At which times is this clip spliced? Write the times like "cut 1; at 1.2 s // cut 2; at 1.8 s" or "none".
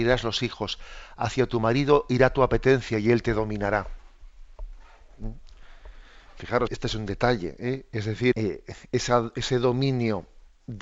cut 1; at 6.7 s // cut 2; at 8.3 s